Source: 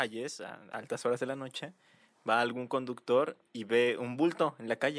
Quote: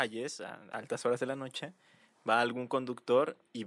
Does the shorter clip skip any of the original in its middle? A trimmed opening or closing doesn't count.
no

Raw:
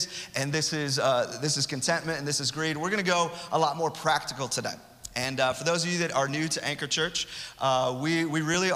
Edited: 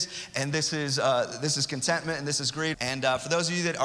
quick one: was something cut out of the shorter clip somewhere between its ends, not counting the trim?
yes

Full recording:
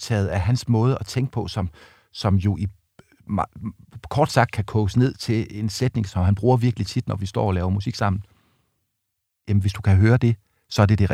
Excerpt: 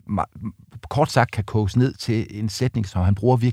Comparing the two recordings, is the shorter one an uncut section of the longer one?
yes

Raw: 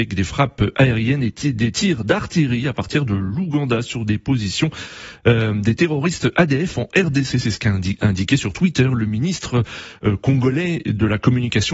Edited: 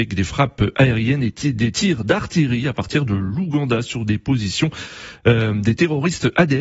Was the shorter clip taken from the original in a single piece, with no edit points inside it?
yes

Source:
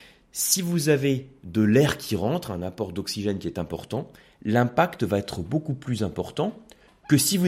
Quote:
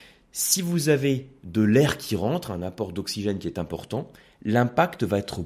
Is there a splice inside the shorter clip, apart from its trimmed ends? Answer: no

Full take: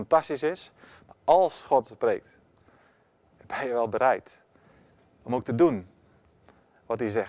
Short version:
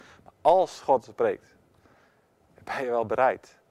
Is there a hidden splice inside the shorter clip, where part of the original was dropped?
no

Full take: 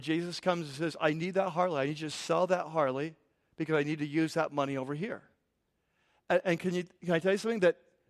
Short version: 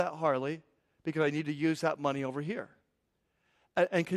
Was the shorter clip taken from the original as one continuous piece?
yes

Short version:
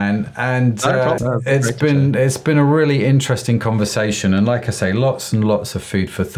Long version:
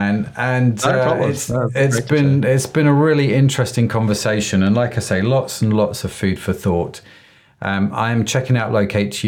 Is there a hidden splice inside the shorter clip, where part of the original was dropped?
yes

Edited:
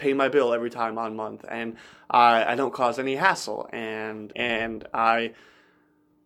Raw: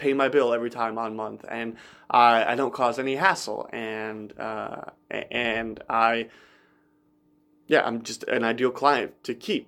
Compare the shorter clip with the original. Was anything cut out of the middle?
yes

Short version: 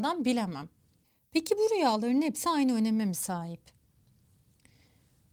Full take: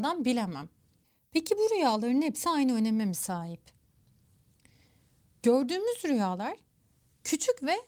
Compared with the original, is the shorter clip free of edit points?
yes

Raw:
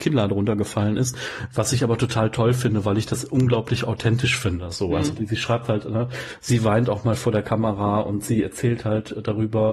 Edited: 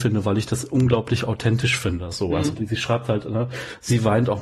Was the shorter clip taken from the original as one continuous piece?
yes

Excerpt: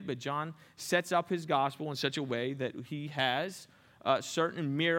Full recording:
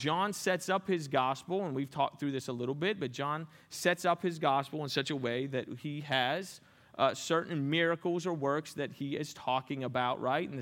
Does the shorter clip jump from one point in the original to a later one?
no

